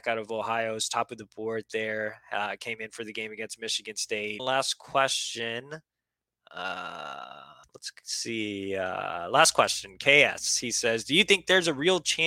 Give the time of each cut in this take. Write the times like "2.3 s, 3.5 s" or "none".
4.4 s, 7.6 s